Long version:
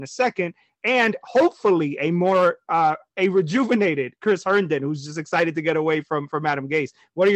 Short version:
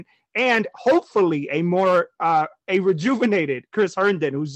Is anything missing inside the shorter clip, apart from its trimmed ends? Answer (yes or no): no